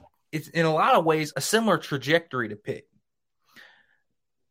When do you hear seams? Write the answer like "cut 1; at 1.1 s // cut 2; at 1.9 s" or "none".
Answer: cut 1; at 1.3 s